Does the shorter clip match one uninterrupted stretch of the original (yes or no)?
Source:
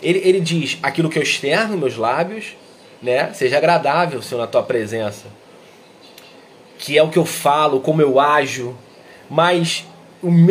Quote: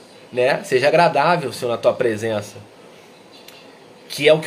yes